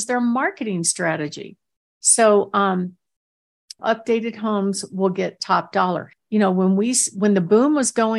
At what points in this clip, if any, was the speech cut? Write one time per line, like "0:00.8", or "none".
0:03.8
0:06.1